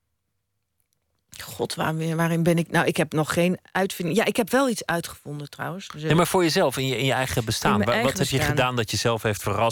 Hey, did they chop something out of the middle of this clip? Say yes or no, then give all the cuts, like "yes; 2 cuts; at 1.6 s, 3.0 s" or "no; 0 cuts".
no; 0 cuts